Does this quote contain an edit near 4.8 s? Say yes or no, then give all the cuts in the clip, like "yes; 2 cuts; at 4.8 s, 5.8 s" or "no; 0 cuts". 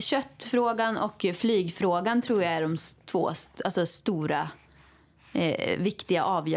no; 0 cuts